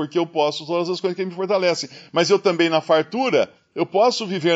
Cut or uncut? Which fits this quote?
uncut